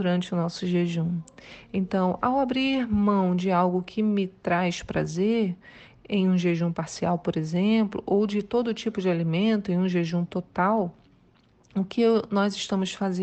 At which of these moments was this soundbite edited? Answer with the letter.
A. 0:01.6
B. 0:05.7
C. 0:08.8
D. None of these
D